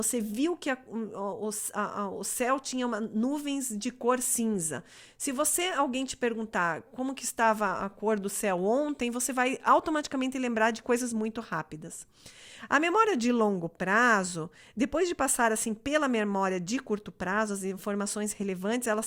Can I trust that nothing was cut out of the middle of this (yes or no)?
yes